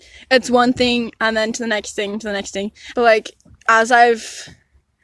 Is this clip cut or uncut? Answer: cut